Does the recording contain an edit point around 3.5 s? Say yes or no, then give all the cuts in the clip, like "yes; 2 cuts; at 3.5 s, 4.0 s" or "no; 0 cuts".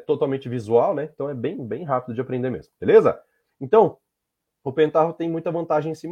yes; 1 cut; at 3.5 s